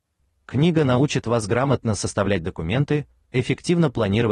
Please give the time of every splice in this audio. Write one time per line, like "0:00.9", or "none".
0:03.2